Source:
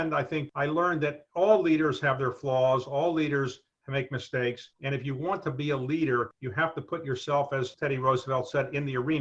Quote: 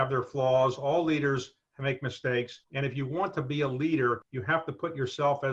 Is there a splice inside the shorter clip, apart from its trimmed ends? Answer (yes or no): no